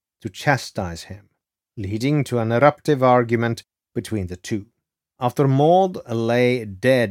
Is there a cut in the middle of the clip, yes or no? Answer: yes